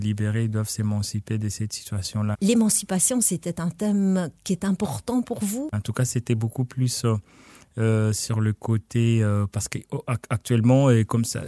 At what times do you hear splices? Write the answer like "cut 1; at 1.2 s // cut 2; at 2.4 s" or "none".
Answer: cut 1; at 2.3 s // cut 2; at 5.7 s